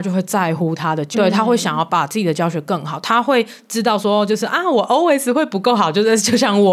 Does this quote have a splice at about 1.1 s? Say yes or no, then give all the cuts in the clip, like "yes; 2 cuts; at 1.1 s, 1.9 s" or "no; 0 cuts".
yes; 1 cut; at 1.1 s